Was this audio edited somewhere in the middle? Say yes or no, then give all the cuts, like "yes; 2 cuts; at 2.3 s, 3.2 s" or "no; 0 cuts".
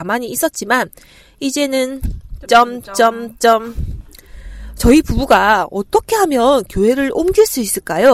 no; 0 cuts